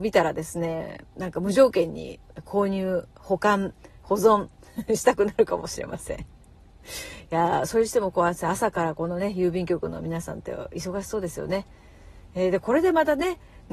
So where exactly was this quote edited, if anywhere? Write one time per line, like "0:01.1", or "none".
0:01.0